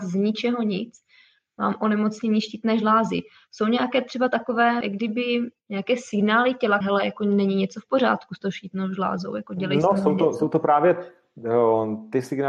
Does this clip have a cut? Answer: yes; 2 cuts; at 4.8 s, 6.8 s

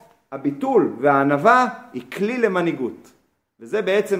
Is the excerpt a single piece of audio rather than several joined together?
yes; 0 cuts

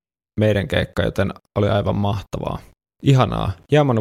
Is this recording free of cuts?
yes; 0 cuts

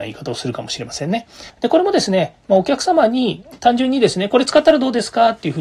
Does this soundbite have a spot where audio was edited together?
yes; 1 cut; at 1.5 s

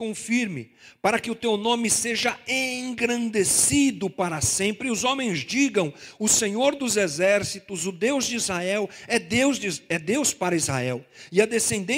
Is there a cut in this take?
no; 0 cuts

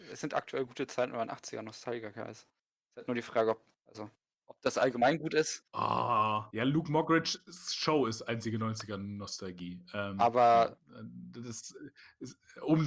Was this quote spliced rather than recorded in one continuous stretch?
yes; 1 cut; at 6.5 s

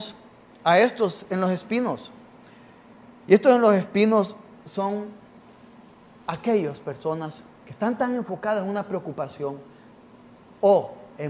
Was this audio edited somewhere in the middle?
yes; 1 cut; at 7.6 s

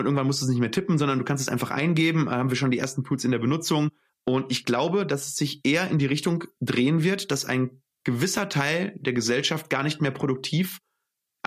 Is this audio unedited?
no; 1 cut; at 4.1 s

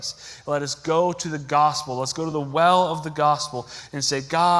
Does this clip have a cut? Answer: no; 0 cuts

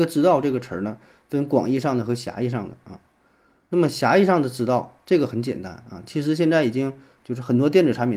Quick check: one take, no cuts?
yes; 0 cuts

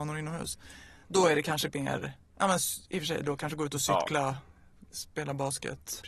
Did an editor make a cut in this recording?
no; 0 cuts

